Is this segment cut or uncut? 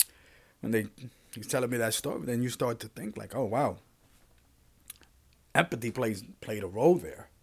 uncut